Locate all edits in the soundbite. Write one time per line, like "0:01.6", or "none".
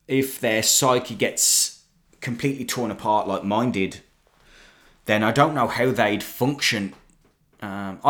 none